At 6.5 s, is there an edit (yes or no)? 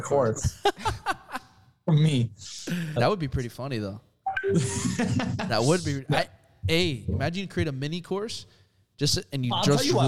no